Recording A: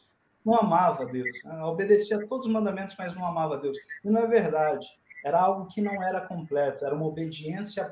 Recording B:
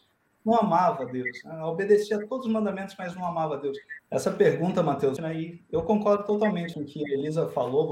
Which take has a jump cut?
B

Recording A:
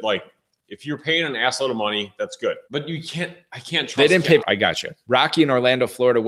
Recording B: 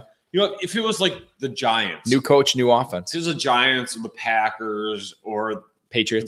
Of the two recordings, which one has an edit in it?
A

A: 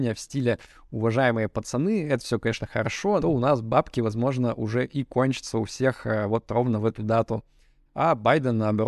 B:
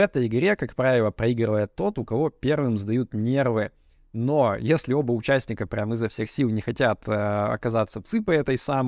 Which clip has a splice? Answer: A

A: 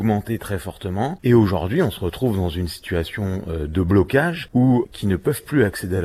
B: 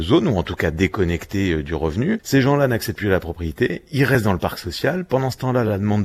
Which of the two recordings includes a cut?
A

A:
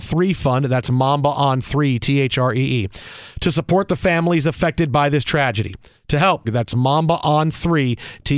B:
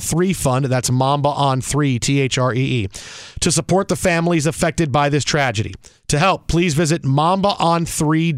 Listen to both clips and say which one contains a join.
A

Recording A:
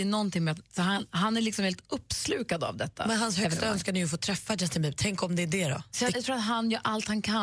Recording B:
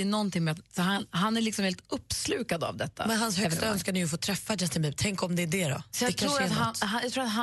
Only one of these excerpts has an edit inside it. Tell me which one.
A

